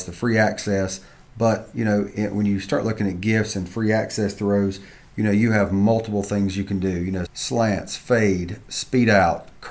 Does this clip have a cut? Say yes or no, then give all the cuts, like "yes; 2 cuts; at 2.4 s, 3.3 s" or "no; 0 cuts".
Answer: yes; 1 cut; at 7.3 s